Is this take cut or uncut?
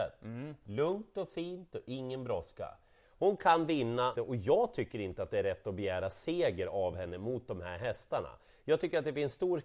cut